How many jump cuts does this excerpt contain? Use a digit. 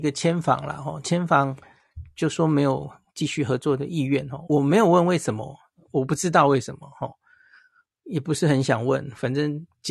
1